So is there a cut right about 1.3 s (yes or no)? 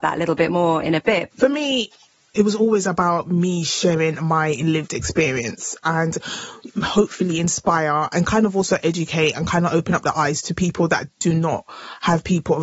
yes